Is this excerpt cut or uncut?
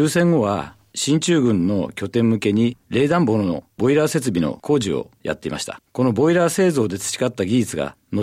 uncut